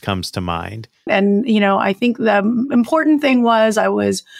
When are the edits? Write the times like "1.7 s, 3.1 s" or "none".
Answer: 1.1 s